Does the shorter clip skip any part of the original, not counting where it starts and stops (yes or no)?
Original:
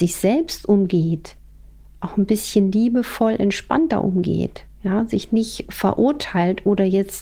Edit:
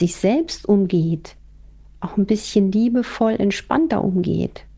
no